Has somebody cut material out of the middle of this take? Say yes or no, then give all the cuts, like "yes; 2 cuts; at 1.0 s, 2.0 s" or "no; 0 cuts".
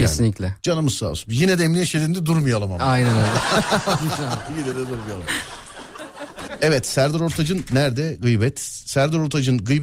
no; 0 cuts